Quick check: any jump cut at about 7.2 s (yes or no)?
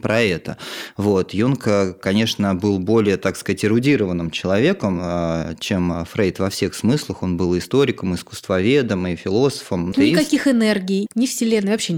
no